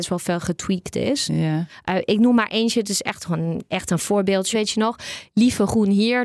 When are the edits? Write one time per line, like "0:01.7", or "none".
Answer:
0:04.5